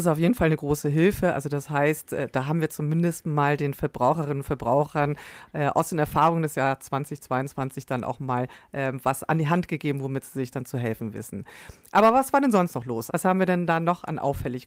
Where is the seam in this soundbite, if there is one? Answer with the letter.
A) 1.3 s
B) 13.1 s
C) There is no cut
B